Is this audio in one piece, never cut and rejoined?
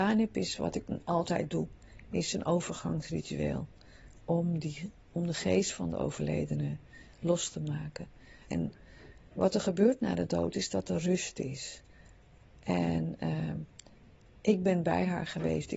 no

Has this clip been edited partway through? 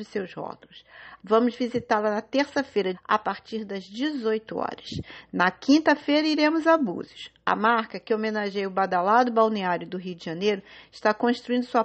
yes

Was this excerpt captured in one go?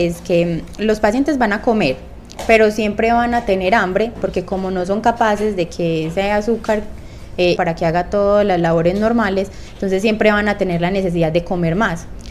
no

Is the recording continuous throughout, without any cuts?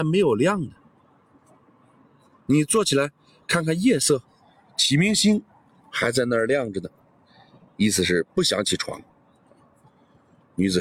yes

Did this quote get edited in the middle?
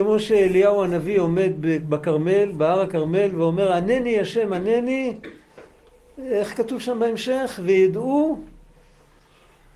no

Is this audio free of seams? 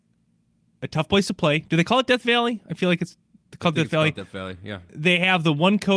yes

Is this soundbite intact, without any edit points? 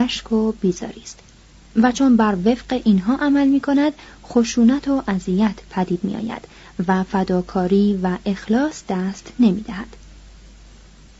yes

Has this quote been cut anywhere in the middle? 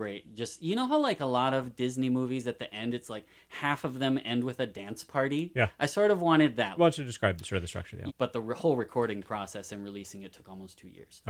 yes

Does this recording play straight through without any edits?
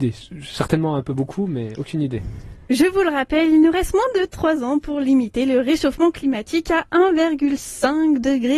no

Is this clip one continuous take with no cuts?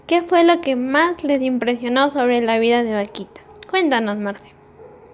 yes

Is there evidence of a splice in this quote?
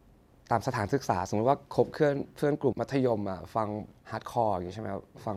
yes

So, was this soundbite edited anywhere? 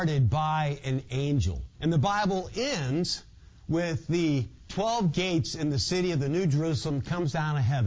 yes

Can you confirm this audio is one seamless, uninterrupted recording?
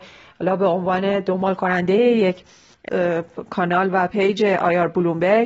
no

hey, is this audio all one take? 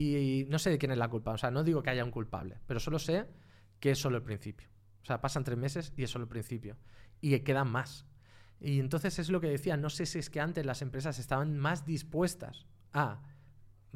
yes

